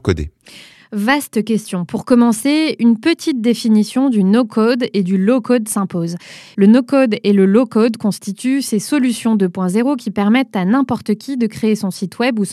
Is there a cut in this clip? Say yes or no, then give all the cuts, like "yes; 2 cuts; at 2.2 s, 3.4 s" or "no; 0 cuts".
yes; 1 cut; at 6.5 s